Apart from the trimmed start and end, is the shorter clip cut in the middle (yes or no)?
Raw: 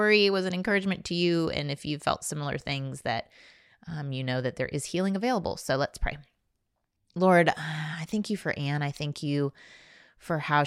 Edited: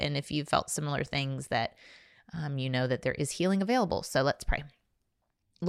no